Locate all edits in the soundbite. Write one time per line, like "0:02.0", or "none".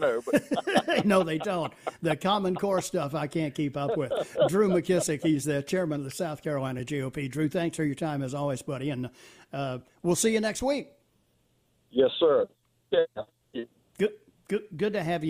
none